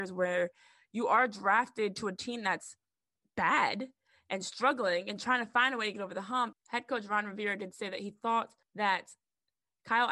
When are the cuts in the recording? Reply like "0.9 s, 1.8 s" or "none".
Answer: 6.5 s, 8.6 s